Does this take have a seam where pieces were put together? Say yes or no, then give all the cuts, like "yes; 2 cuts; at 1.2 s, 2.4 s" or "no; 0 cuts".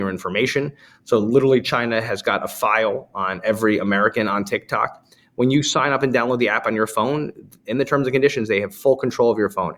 no; 0 cuts